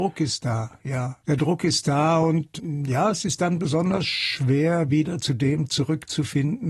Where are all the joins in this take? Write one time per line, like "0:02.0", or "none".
0:01.2